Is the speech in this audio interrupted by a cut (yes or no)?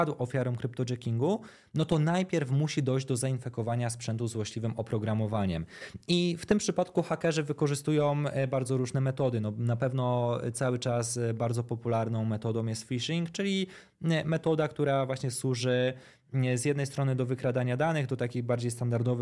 no